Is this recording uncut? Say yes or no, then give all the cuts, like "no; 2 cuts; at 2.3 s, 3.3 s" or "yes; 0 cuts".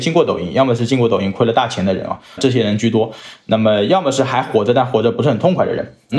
yes; 0 cuts